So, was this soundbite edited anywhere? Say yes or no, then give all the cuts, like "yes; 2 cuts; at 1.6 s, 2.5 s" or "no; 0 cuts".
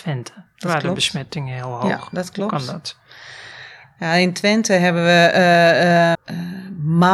yes; 1 cut; at 6.1 s